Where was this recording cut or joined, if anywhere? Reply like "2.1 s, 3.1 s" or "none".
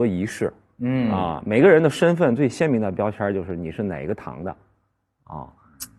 none

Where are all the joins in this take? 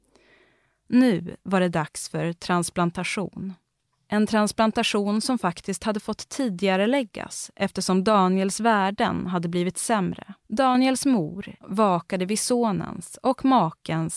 10.4 s, 11.6 s

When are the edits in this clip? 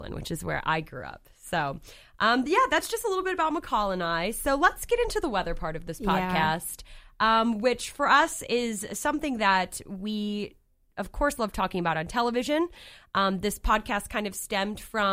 none

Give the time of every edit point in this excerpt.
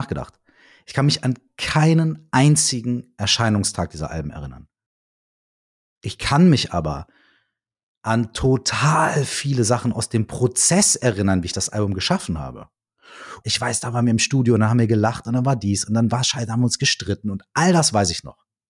13.4 s

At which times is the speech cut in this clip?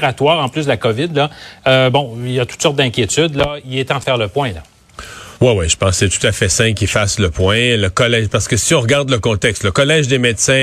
5.4 s

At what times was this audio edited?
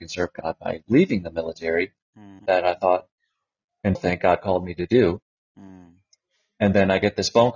2.4 s, 4.0 s

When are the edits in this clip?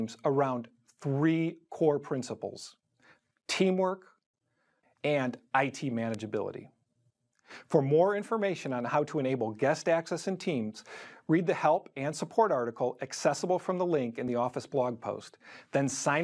4.8 s

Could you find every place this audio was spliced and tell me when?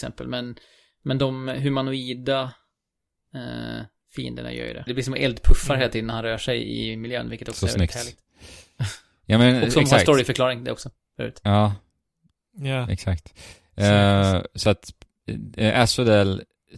4.9 s

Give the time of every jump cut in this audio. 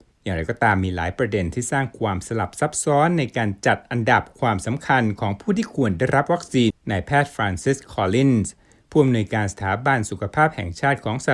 6.7 s

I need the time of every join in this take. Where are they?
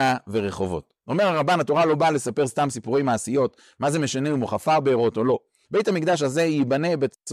5.6 s

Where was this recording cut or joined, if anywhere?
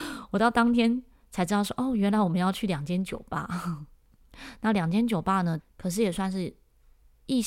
5.6 s

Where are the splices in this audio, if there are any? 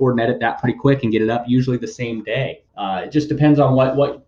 2.7 s

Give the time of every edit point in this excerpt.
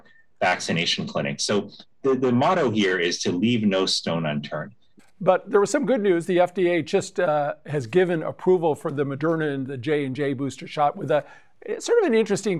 5.0 s

